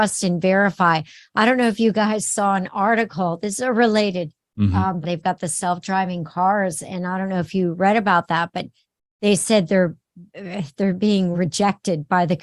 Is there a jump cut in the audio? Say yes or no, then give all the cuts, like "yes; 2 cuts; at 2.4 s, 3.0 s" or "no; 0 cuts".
yes; 2 cuts; at 5.0 s, 11.3 s